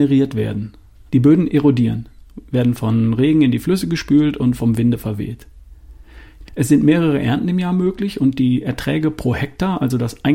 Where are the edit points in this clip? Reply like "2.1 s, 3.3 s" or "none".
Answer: 1.1 s, 6.5 s